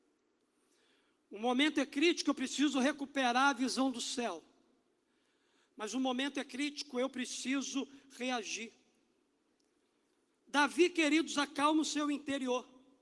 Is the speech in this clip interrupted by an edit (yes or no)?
no